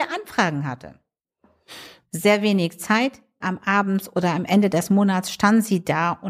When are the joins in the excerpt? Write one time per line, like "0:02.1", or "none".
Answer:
0:02.1
0:03.4